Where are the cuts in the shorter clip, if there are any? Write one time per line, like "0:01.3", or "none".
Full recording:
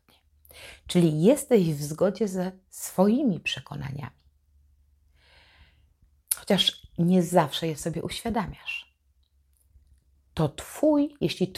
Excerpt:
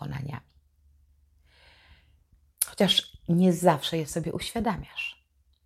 none